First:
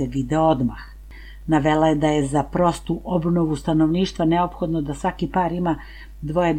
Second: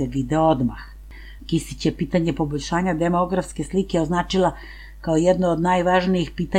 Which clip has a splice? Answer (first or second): second